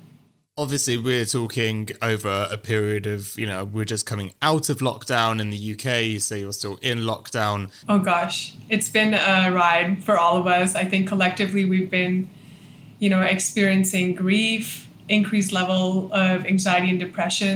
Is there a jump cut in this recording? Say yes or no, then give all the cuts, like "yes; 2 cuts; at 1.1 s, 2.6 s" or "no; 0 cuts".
yes; 2 cuts; at 7.8 s, 15.0 s